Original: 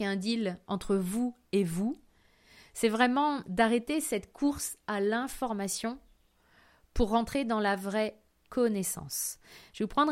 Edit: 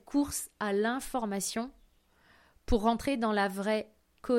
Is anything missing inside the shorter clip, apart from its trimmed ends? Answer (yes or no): no